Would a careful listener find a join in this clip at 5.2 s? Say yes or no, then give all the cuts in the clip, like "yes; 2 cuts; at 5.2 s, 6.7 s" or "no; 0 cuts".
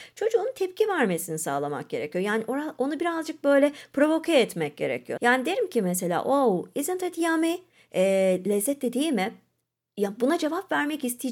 yes; 1 cut; at 5.2 s